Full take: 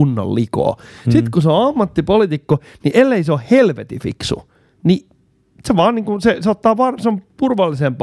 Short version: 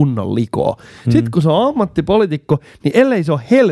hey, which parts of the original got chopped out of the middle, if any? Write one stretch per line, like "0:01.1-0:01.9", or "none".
none